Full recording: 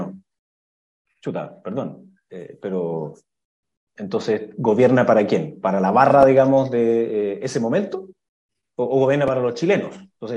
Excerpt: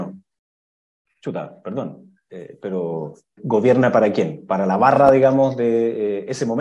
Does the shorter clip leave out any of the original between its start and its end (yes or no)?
yes